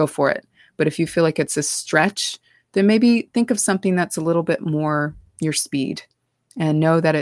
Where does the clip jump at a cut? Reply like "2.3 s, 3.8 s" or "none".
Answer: none